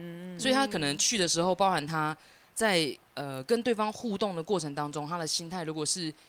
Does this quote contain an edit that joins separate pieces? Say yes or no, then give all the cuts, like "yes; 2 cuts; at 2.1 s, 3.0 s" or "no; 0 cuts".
no; 0 cuts